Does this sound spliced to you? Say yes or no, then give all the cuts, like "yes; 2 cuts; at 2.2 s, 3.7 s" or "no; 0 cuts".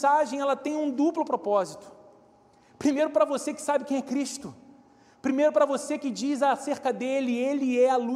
no; 0 cuts